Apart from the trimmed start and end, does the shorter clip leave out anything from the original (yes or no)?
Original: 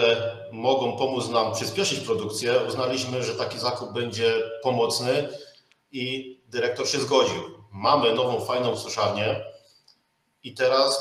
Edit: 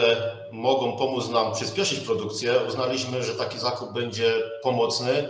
no